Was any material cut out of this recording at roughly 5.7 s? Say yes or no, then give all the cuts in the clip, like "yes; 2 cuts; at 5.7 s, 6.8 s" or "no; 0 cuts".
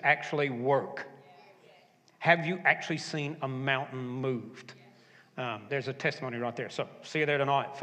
yes; 1 cut; at 5.7 s